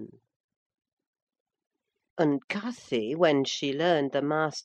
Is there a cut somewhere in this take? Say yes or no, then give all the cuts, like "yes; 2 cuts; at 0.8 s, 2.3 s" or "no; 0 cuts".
yes; 1 cut; at 2.0 s